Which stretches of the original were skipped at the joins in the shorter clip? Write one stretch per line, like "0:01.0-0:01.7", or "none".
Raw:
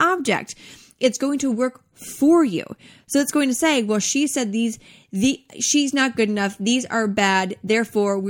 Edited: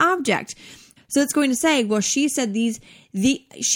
0:01.0-0:02.9

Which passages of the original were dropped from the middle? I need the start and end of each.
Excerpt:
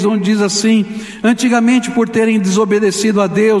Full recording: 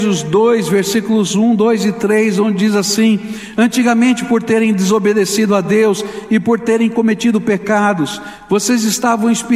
none

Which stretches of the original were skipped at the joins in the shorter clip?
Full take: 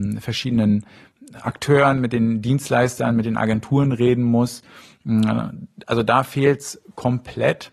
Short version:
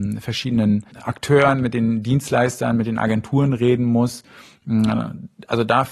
0:00.9-0:01.3

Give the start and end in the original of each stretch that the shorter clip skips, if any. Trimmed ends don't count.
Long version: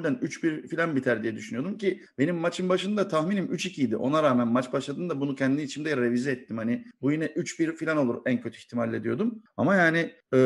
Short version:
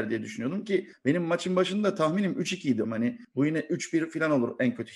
0:04.0-0:06.5

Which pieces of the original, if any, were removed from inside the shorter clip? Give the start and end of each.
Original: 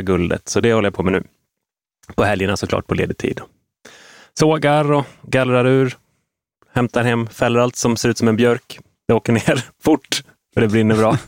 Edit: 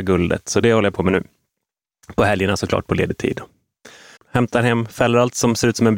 0:04.2-0:06.6

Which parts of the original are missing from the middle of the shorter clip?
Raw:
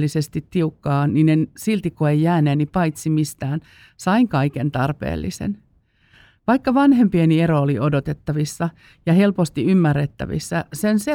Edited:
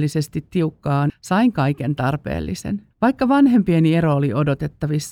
0:01.1-0:03.9
0:05.7-0:06.4

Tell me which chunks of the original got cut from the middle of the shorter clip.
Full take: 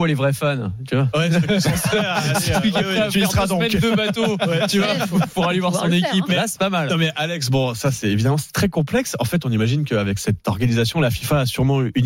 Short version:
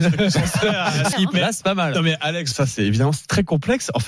0:02.4-0:06.1
0:07.5-0:07.8

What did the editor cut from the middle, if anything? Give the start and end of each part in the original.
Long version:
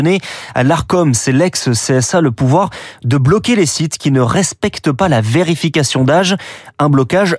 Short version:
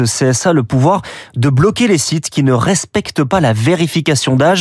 none

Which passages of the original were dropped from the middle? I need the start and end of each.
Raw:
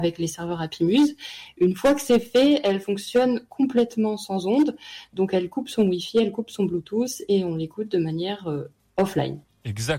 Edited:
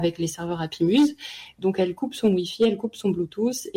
0:01.5-0:05.1

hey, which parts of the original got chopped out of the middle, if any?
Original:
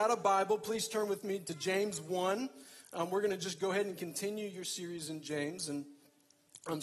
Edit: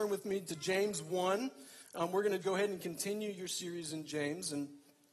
0:03.4-0:03.6

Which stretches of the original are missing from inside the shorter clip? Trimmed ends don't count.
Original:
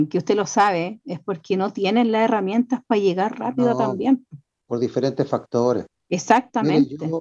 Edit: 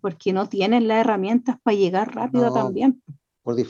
none

